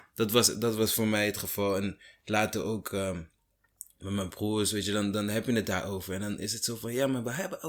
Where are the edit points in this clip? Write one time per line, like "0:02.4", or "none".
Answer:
none